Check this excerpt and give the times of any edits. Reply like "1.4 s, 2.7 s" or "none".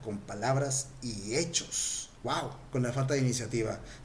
2.2 s